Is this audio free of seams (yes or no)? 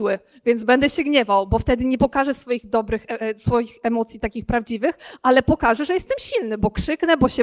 yes